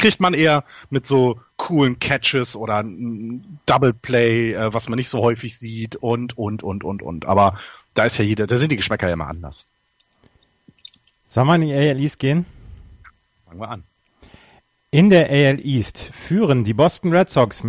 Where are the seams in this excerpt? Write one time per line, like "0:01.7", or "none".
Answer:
none